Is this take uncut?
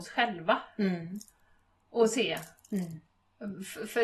yes; 0 cuts

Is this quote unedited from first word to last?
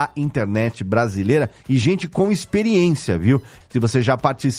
no; 1 cut; at 3.6 s

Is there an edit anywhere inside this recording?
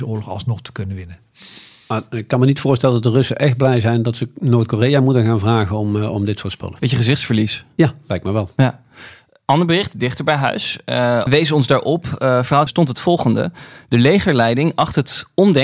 yes; 2 cuts; at 11.3 s, 12.7 s

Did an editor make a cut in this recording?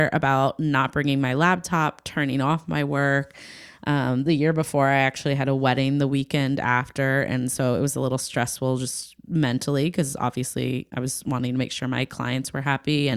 no; 0 cuts

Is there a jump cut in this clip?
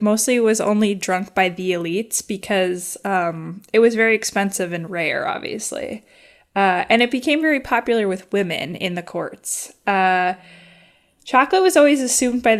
no; 0 cuts

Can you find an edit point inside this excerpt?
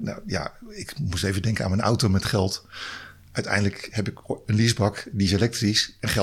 no; 0 cuts

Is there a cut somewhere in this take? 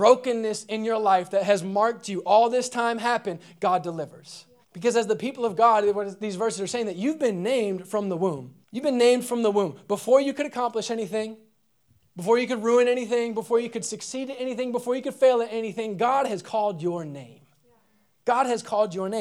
yes; 2 cuts; at 4.6 s, 8.6 s

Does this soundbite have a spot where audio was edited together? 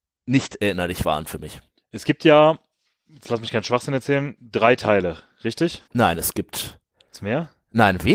yes; 1 cut; at 5.9 s

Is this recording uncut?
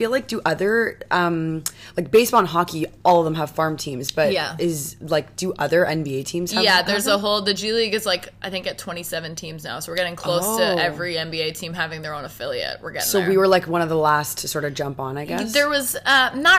yes; 0 cuts

